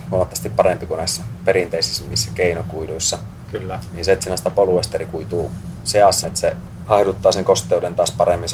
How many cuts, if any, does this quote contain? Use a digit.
1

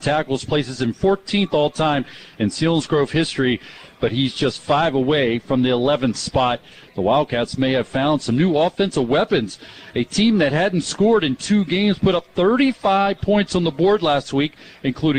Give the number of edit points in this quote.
1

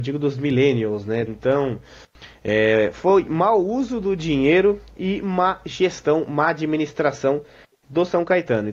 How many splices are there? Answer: 1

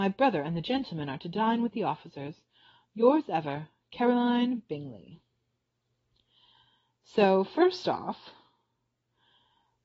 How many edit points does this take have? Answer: 0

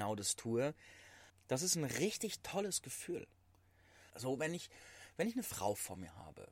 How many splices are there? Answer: 2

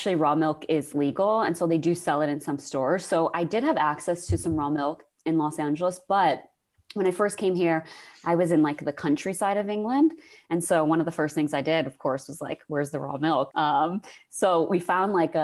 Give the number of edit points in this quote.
1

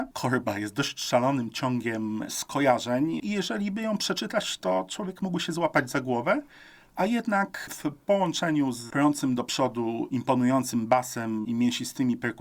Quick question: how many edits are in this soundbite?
1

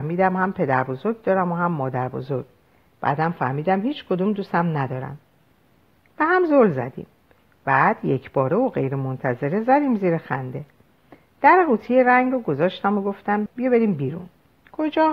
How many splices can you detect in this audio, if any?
1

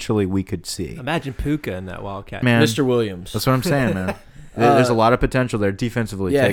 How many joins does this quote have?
1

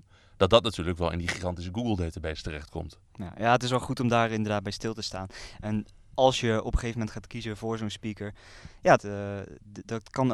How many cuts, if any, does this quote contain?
1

